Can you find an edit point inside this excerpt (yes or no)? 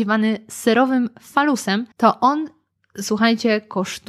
yes